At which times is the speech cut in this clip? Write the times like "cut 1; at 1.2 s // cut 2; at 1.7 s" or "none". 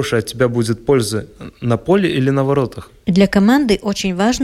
cut 1; at 3.0 s